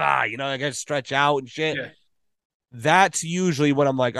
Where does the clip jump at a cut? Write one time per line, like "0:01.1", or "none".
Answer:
none